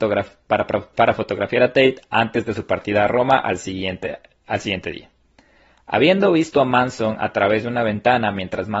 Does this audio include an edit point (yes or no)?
no